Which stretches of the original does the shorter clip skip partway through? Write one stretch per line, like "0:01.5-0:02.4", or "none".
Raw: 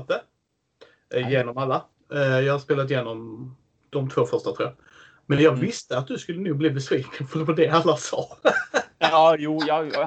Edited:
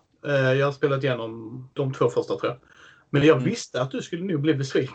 0:03.6-0:03.9